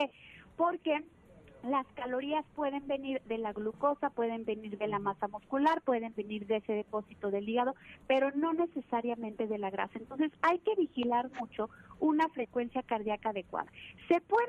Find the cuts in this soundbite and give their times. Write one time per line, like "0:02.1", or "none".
none